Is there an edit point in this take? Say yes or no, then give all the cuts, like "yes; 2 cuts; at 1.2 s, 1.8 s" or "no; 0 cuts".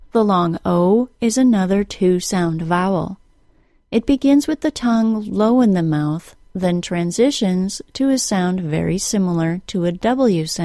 no; 0 cuts